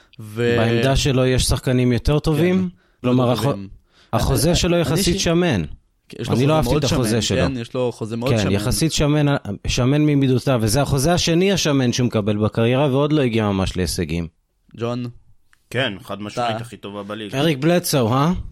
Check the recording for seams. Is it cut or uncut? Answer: cut